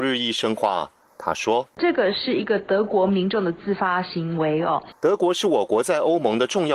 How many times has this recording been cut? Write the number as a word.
two